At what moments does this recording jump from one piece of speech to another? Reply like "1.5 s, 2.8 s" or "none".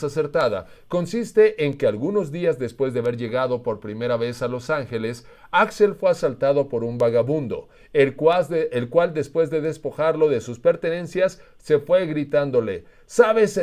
none